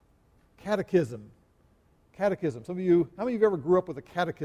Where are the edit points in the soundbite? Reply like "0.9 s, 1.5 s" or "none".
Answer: none